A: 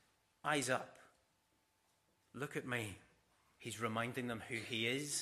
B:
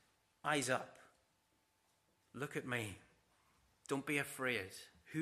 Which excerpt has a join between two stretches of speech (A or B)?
A